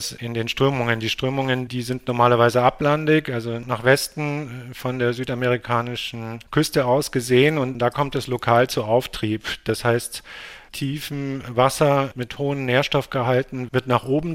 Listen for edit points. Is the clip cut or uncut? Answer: uncut